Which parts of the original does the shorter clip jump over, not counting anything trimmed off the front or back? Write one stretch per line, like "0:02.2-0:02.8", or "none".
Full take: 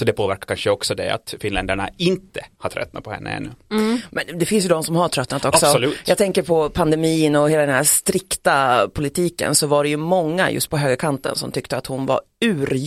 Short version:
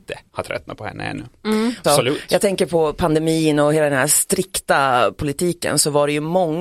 0:04.1-0:05.6